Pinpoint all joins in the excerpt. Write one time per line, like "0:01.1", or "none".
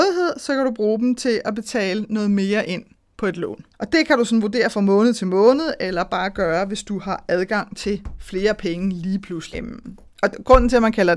0:03.7
0:09.5

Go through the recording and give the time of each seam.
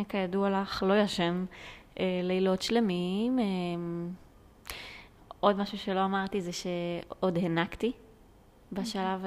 none

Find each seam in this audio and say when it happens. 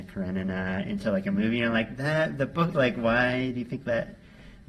0:02.7

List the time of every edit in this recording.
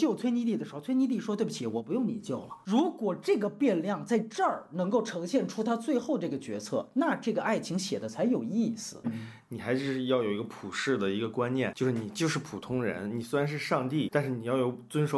0:09.0

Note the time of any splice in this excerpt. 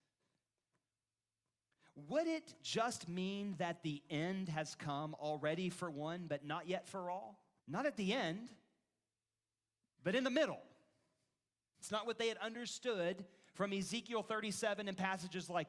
0:07.6
0:11.8

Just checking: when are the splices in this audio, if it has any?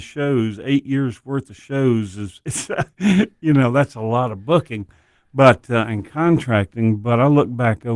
none

